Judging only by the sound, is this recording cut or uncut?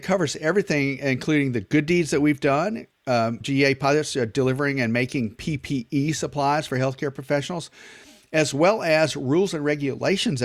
cut